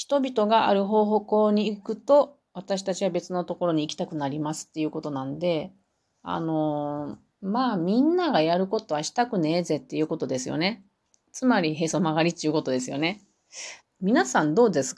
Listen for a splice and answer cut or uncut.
cut